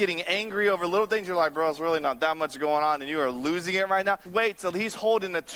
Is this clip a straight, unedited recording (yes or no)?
no